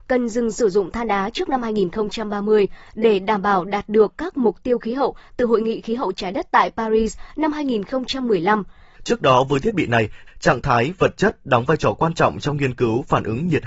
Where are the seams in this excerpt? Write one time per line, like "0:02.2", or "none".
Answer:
0:09.0
0:10.3